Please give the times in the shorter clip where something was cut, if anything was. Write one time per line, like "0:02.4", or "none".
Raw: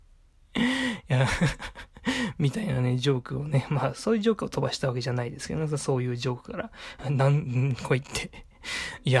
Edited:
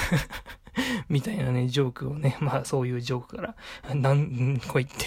0:02.6

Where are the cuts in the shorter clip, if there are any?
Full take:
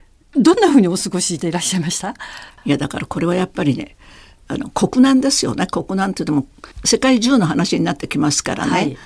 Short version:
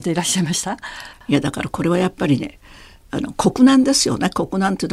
none

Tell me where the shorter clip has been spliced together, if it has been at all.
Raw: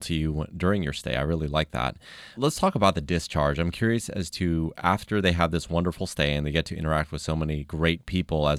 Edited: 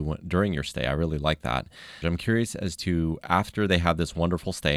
0:02.0

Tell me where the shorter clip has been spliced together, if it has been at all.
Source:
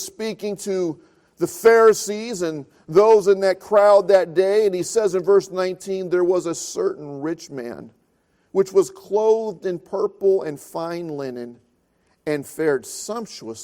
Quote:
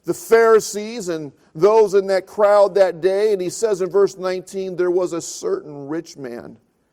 none

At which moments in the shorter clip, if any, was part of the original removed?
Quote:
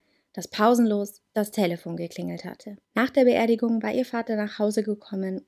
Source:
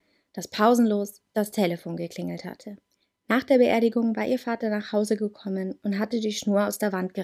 0:02.8

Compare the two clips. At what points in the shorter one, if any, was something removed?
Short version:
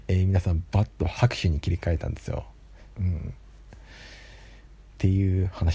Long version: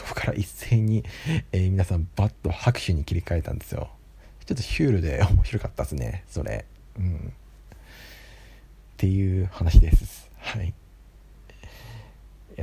0:02.9

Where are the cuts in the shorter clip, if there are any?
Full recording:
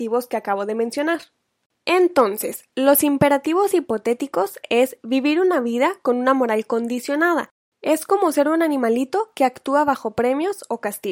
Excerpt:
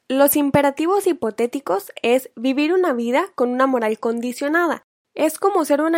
none

